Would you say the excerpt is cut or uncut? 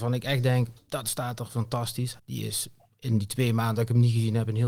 cut